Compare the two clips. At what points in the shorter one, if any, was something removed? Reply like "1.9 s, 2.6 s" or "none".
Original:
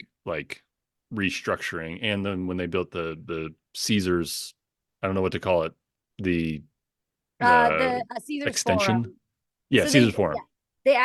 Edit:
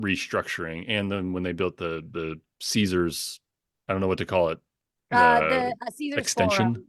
5.0 s